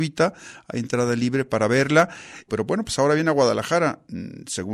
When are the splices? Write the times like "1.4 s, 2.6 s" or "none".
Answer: 2.5 s